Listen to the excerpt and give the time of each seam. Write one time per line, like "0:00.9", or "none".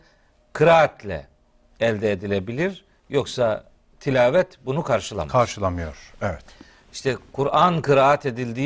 none